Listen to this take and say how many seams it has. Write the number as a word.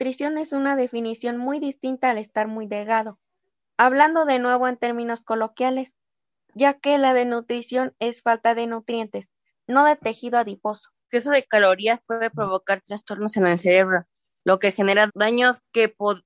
one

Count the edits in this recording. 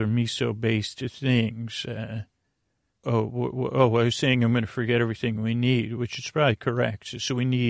one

